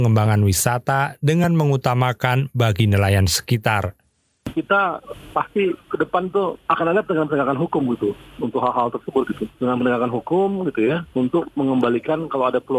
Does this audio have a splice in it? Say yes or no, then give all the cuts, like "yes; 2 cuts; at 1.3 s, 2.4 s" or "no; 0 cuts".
no; 0 cuts